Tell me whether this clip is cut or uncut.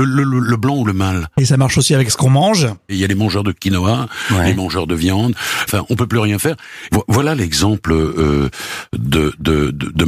cut